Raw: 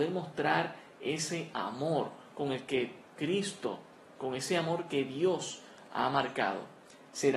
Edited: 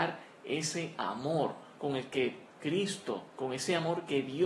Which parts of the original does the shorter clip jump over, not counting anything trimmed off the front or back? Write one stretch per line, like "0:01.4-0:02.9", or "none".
0:03.9-0:04.1